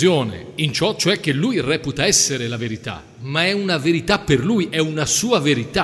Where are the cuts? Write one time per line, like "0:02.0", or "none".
none